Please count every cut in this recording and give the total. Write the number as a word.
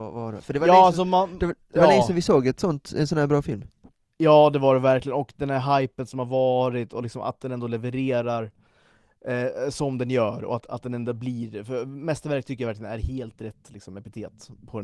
zero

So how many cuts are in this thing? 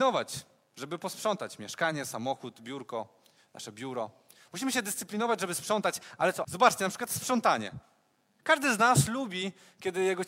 two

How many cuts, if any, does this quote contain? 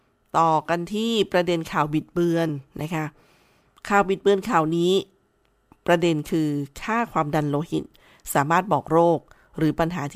zero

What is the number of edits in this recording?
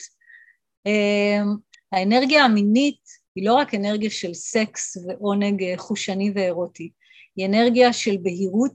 two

